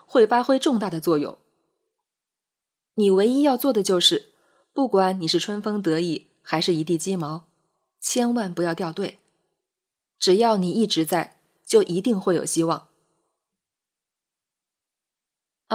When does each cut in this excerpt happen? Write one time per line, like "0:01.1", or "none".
none